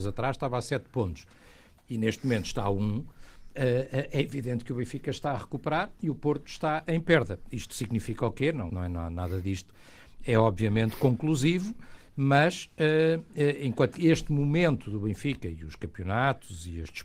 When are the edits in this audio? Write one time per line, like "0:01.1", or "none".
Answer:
0:06.9
0:08.7